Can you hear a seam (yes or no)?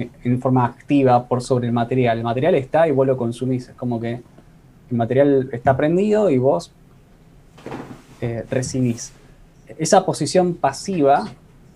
no